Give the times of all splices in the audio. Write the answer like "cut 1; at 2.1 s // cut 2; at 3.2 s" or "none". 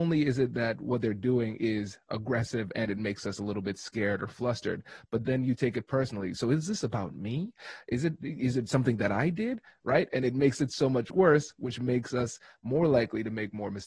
none